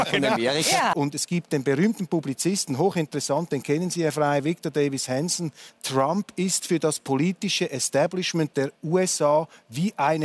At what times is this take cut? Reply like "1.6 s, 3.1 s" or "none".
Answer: 0.9 s, 5.7 s